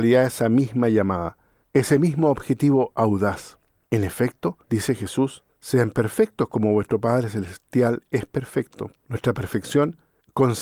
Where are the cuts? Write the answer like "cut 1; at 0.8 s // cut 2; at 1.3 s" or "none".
cut 1; at 9.0 s